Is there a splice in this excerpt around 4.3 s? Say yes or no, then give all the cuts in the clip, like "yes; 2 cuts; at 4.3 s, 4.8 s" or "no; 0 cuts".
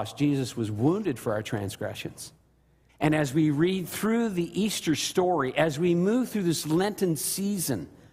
no; 1 cut; at 2.9 s